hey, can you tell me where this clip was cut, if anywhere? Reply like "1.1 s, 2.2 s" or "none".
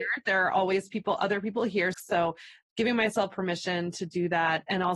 1.9 s